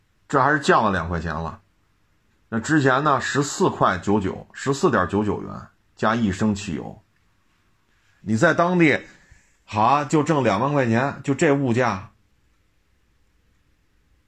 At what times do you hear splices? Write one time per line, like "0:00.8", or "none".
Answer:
0:08.2